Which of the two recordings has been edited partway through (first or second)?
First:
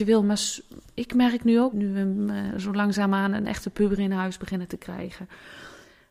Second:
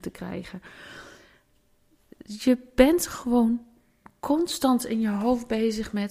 first